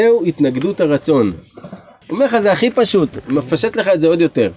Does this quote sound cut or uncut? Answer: cut